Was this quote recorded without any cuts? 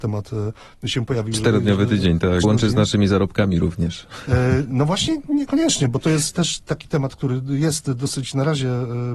no; 1 cut; at 2.4 s

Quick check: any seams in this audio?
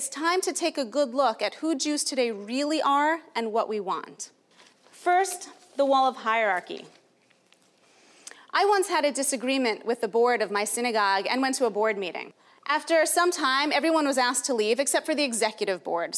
no; 0 cuts

